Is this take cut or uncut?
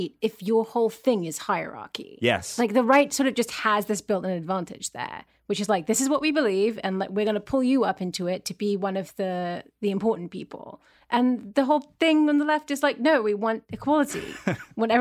uncut